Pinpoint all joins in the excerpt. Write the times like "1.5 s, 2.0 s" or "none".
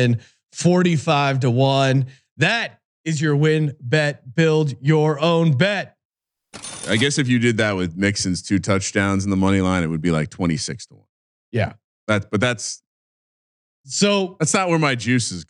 none